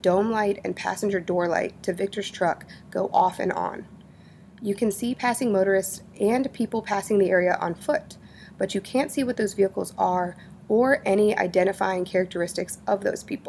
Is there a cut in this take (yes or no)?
no